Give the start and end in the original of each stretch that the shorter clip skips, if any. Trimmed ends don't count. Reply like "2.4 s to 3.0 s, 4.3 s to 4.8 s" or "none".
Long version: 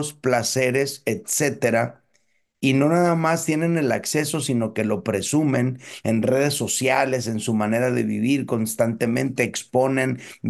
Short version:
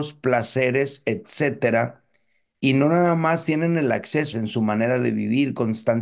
4.3 s to 7.2 s